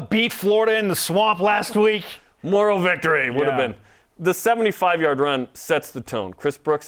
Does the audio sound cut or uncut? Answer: uncut